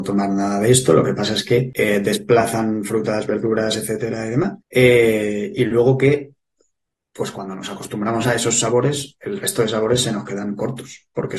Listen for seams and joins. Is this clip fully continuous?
yes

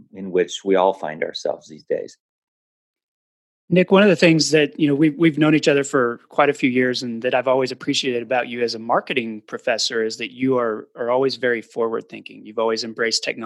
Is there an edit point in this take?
no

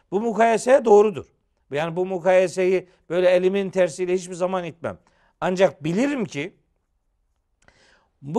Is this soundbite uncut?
yes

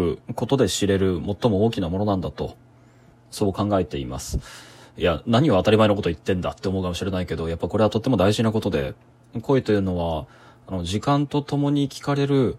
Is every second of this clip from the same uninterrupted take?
yes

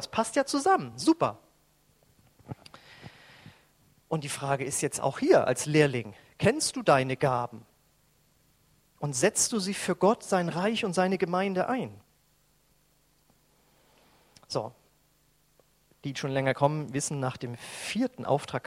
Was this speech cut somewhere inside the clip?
no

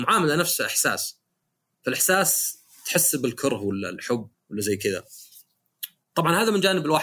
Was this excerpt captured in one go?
no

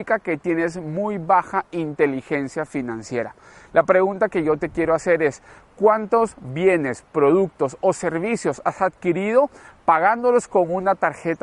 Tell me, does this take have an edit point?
no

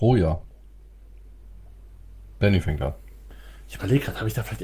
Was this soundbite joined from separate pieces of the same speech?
no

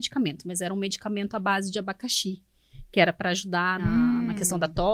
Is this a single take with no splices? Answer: no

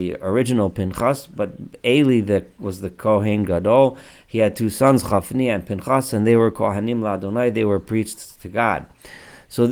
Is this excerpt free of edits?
yes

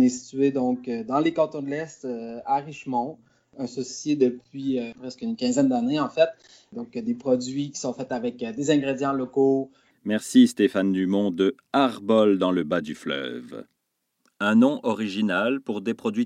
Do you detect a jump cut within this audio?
yes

